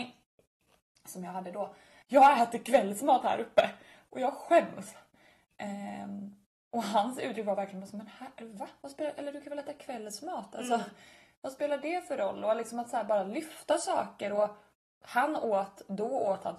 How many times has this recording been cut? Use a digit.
1